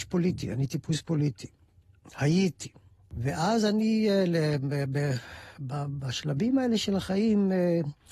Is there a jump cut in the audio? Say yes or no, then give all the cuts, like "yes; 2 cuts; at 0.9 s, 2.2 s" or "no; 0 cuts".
no; 0 cuts